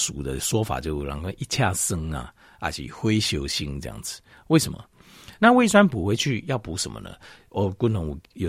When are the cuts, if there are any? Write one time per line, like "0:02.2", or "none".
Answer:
0:05.4